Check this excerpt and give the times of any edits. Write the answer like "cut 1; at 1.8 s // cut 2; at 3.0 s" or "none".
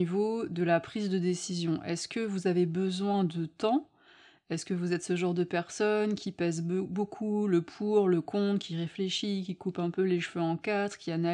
none